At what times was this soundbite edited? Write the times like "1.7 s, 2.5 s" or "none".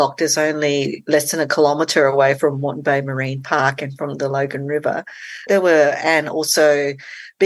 5.5 s

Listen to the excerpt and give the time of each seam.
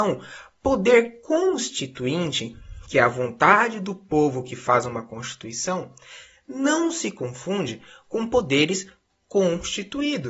none

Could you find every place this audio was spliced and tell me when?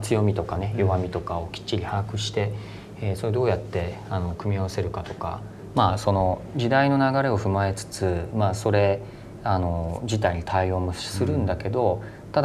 5.7 s

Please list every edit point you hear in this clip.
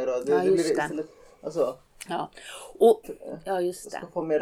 3.0 s

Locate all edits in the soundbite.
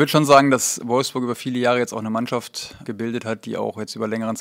2.8 s

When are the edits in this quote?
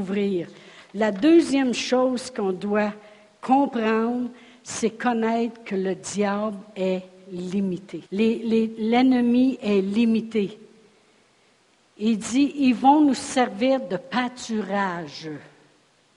8.1 s

